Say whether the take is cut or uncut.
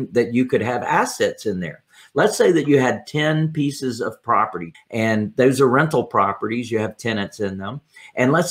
cut